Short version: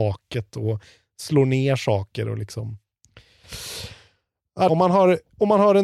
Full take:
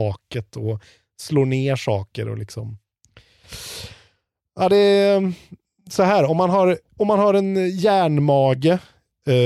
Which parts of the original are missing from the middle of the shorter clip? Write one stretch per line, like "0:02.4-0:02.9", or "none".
0:04.7-0:06.3